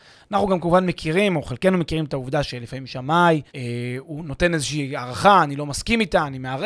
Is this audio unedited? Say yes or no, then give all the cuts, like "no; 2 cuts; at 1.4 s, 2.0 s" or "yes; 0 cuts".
no; 1 cut; at 3.5 s